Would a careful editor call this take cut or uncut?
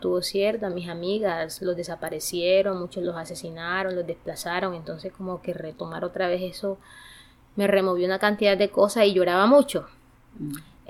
uncut